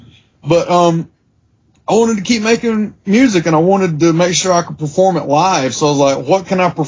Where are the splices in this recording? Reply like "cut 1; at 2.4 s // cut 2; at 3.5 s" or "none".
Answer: none